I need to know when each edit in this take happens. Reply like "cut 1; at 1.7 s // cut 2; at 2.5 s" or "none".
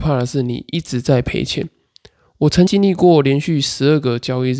cut 1; at 2.7 s